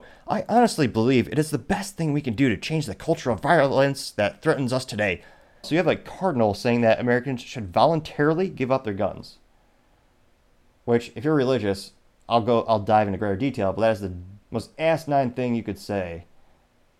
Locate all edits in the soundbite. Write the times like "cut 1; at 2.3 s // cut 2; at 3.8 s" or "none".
cut 1; at 5.6 s // cut 2; at 14.4 s